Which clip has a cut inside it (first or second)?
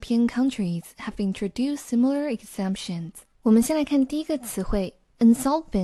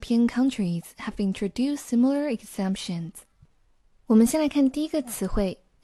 first